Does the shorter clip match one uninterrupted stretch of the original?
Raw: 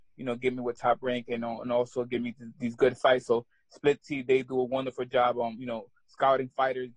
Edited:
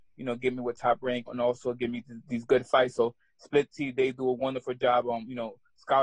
no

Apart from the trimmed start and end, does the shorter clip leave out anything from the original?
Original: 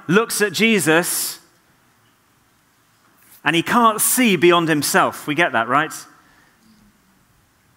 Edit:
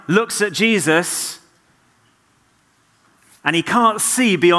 no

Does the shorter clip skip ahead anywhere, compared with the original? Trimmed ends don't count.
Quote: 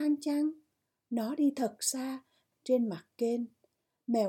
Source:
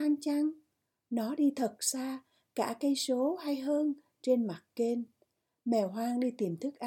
yes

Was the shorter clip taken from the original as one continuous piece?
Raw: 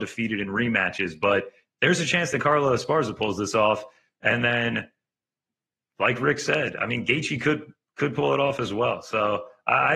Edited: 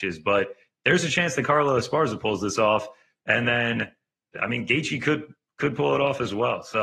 no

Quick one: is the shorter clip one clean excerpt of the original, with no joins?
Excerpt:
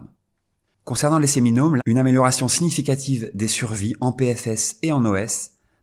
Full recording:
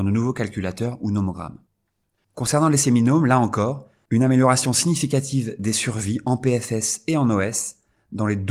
no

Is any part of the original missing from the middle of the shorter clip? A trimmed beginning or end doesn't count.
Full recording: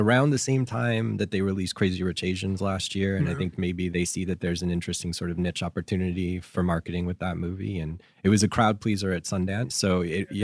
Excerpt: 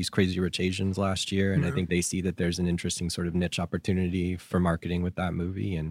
yes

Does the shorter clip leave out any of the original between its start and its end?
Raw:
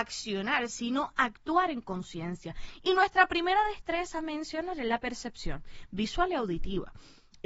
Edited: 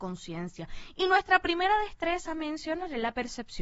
no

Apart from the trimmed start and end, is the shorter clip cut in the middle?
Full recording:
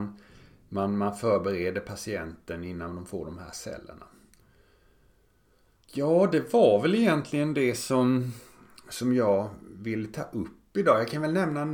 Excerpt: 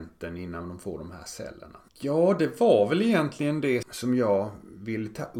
yes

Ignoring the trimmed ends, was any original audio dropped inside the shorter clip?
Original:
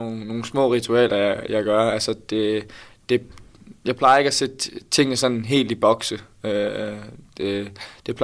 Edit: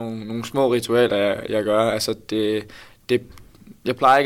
no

